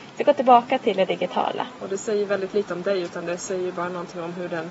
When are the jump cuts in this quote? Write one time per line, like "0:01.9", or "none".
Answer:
0:01.8